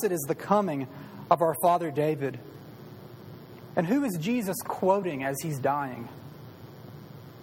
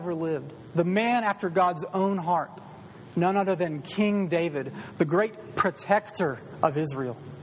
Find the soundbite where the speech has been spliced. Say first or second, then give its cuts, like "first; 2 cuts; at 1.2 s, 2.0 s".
first; 1 cut; at 3.7 s